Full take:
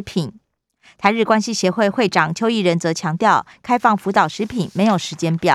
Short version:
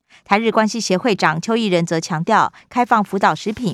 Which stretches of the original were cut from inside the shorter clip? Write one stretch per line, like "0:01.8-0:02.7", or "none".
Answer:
0:01.7-0:01.9